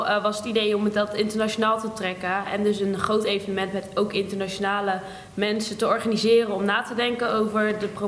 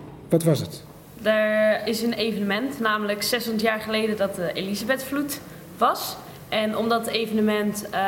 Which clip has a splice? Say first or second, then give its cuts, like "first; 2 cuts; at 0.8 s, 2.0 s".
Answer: second; 1 cut; at 1.8 s